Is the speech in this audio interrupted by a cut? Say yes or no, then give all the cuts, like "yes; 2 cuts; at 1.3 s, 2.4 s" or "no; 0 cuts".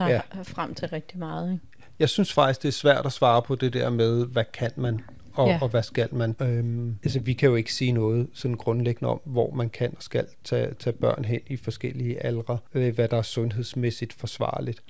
yes; 1 cut; at 6.4 s